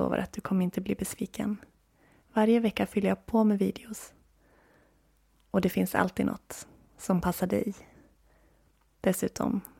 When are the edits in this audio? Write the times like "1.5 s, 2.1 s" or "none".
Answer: none